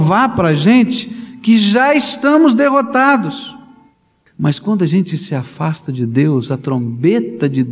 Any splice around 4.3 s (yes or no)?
yes